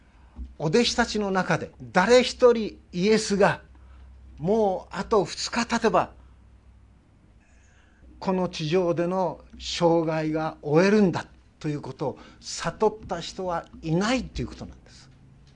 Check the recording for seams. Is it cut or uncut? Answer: cut